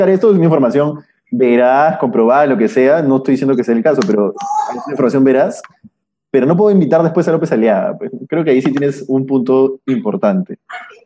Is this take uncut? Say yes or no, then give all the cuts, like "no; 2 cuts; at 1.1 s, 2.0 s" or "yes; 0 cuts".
yes; 0 cuts